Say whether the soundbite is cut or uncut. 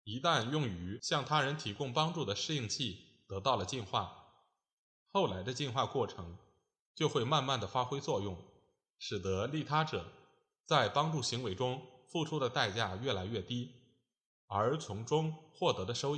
uncut